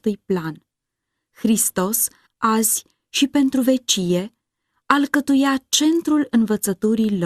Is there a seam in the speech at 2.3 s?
yes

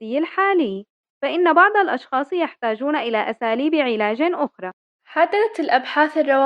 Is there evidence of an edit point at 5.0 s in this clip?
no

